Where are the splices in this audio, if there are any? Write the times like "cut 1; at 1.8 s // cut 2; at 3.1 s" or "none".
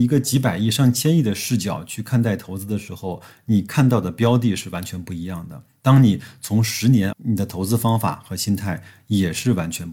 cut 1; at 7.1 s